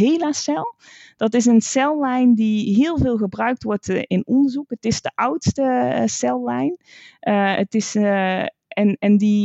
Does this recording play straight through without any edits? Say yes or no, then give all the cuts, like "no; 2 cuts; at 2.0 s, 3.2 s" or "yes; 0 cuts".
yes; 0 cuts